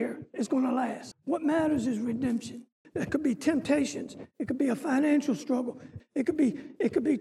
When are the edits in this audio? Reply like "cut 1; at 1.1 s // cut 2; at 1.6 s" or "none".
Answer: cut 1; at 1.1 s // cut 2; at 2.8 s // cut 3; at 6.0 s